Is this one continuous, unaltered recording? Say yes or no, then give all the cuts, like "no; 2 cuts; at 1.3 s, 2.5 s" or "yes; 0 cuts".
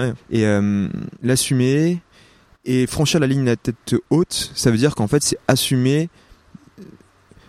no; 1 cut; at 1.1 s